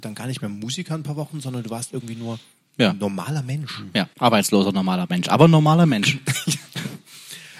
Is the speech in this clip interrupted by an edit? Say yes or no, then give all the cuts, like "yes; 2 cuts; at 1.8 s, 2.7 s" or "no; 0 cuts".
yes; 1 cut; at 4.1 s